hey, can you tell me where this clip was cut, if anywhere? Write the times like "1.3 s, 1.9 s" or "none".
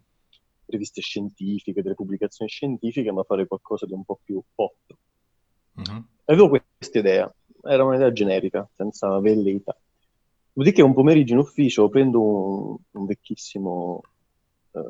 none